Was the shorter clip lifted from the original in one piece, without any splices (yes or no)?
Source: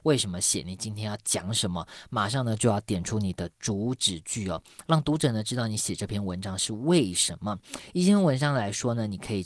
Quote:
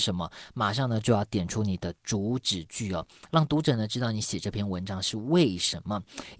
yes